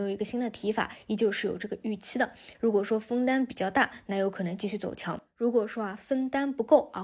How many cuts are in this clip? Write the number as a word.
one